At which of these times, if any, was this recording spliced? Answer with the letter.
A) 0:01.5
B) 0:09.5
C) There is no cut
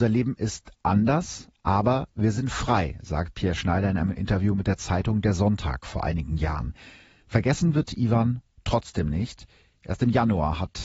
C